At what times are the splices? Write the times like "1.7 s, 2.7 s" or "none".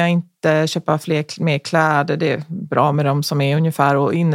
none